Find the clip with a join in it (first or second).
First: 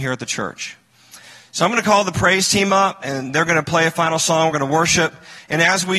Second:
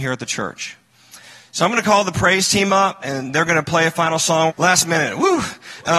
second